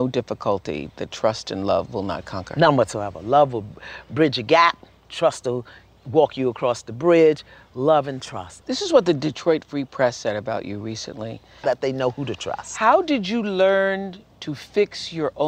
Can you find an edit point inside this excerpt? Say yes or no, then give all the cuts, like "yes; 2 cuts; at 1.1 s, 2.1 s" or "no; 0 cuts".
yes; 2 cuts; at 8.6 s, 11.6 s